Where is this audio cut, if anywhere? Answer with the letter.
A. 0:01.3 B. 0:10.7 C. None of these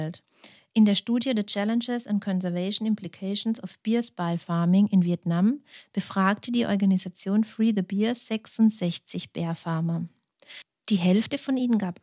C